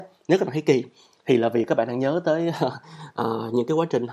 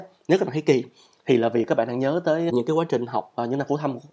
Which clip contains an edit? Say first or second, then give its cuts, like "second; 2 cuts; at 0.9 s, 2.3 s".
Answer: second; 1 cut; at 2.5 s